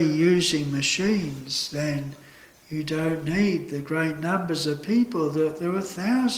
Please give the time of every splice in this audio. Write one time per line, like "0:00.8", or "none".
none